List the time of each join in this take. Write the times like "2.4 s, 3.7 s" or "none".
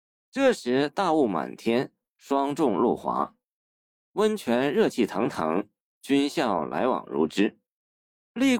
none